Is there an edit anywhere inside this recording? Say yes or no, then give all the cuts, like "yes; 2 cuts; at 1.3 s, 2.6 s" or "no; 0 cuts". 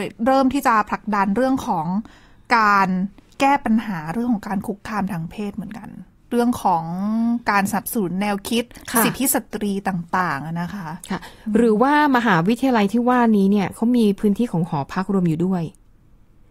no; 0 cuts